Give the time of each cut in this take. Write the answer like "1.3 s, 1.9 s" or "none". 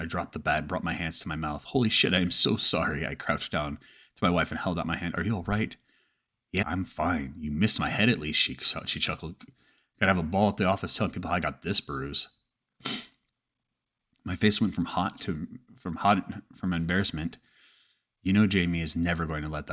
6.6 s

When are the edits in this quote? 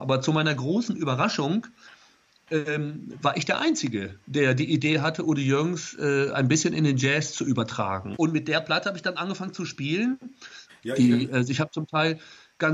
4.2 s, 8.2 s, 10.7 s

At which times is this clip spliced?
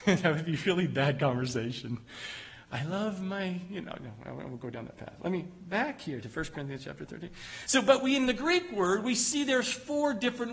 none

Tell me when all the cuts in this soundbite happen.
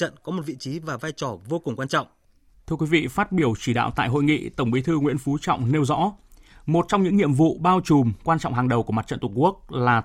2.5 s

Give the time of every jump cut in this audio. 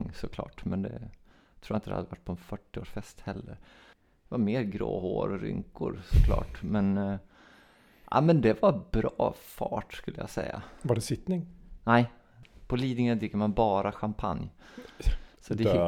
none

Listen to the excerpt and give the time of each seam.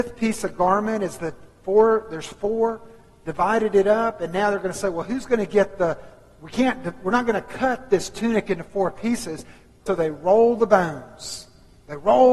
9.9 s

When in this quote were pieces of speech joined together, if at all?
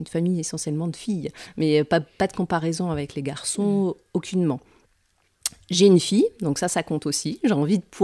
none

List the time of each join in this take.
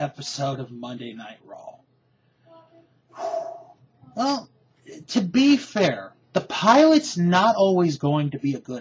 6.2 s

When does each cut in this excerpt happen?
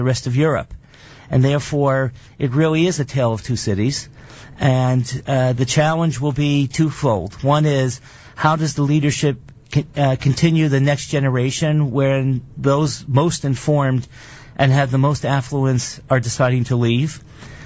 none

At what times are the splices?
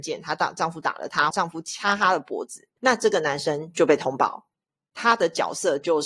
1.3 s

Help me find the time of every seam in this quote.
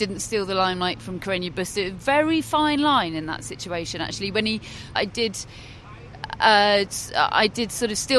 5.0 s

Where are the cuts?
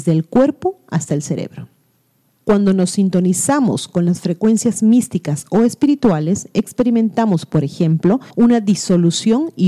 2.4 s, 8.3 s

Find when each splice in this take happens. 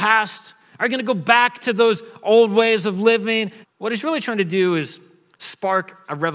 3.6 s

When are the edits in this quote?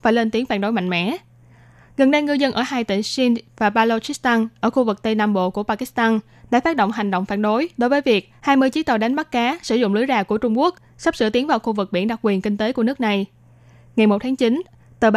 none

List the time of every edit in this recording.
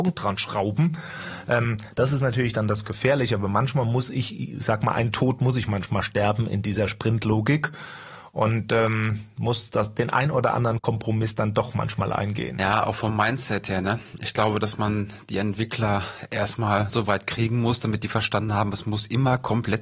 none

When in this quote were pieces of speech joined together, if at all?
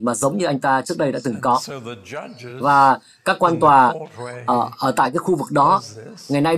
none

